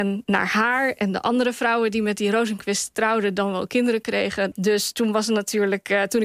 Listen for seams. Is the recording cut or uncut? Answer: cut